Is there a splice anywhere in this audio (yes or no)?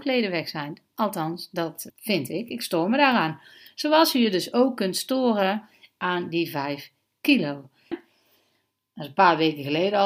yes